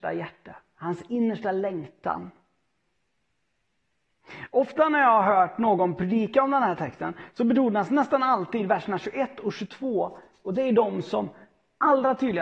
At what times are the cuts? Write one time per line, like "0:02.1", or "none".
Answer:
none